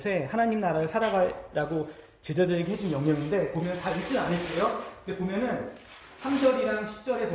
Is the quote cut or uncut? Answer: uncut